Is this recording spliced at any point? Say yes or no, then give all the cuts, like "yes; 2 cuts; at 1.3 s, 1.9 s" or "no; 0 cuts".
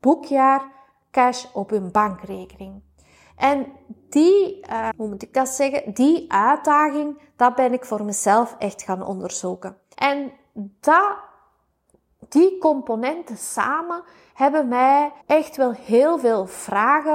yes; 3 cuts; at 4.9 s, 9.9 s, 15.2 s